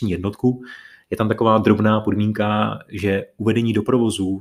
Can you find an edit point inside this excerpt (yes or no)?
no